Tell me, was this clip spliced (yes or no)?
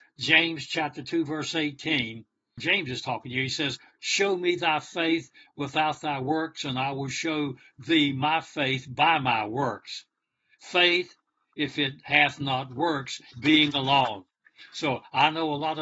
yes